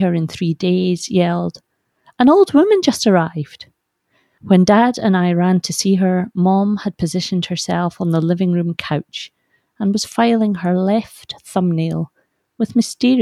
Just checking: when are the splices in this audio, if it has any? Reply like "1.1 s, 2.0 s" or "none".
none